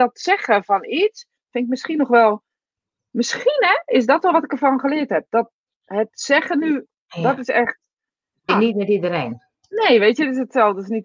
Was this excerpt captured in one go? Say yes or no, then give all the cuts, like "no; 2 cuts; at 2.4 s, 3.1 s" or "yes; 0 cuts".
no; 1 cut; at 8.5 s